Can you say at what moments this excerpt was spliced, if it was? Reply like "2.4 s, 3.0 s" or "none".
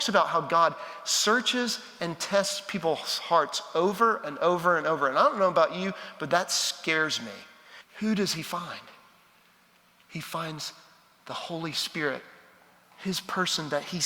7.8 s